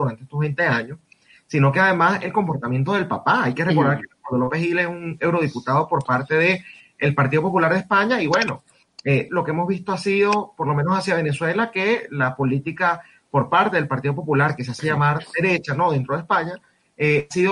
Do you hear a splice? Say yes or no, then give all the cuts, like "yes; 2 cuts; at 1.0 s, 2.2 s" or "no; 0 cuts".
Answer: yes; 1 cut; at 9.3 s